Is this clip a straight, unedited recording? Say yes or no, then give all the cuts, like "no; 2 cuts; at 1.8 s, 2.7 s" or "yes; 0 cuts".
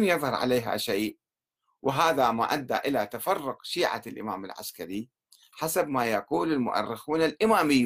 yes; 0 cuts